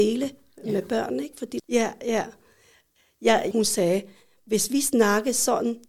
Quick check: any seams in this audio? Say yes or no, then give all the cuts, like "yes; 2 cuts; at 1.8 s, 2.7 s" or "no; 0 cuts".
yes; 2 cuts; at 1.6 s, 3.5 s